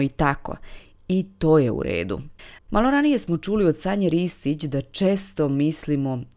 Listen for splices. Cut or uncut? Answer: cut